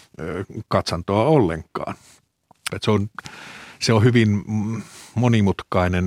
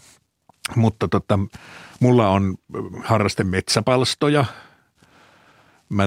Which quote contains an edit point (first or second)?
first